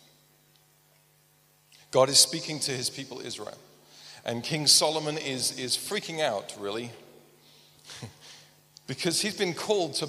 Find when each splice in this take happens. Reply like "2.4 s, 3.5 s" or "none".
none